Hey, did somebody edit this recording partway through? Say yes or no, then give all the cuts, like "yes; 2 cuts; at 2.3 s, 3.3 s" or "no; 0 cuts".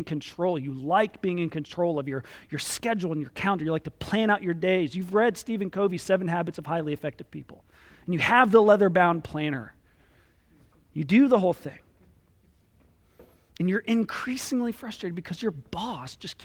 no; 0 cuts